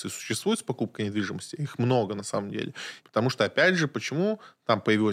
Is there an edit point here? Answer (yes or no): yes